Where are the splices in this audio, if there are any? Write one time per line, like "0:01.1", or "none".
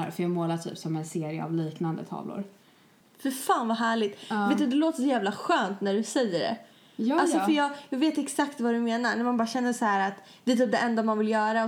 0:03.0